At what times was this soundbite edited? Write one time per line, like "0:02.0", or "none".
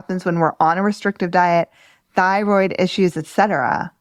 none